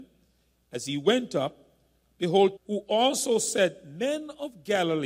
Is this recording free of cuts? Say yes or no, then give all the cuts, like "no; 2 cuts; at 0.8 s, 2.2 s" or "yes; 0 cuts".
no; 1 cut; at 2.6 s